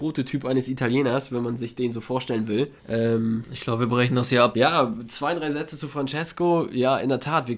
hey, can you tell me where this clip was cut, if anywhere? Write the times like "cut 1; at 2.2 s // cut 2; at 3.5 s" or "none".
cut 1; at 2.8 s // cut 2; at 4.5 s